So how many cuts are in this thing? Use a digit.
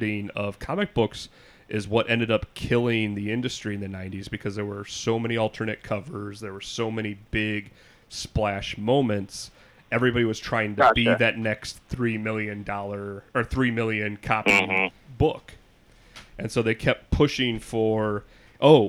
0